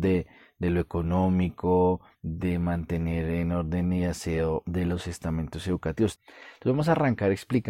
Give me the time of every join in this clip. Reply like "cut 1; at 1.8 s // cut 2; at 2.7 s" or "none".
cut 1; at 2.1 s // cut 2; at 6.2 s